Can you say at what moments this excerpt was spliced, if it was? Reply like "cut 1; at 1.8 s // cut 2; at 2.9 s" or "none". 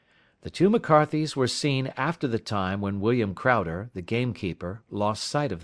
none